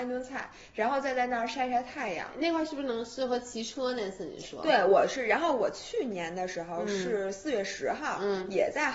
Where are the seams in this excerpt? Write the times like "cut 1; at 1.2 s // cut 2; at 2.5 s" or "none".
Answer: none